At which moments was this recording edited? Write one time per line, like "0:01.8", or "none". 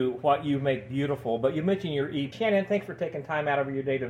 0:02.3